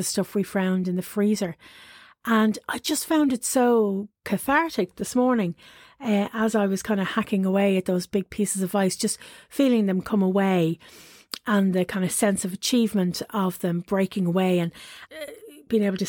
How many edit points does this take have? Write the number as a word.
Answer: one